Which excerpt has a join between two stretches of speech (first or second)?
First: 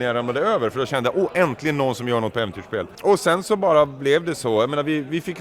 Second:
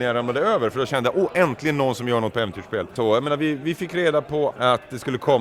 second